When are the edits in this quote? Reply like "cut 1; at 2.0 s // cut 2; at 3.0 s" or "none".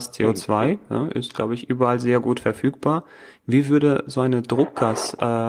none